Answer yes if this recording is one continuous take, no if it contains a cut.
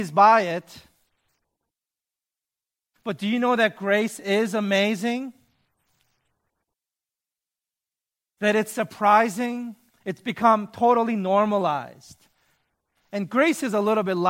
no